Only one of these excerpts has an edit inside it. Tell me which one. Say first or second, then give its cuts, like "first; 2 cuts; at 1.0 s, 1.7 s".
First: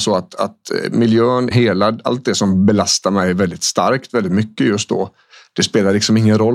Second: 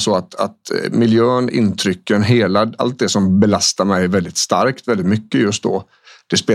first; 1 cut; at 1.5 s